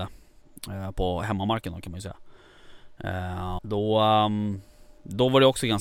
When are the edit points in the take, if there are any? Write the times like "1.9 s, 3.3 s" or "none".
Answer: 3.6 s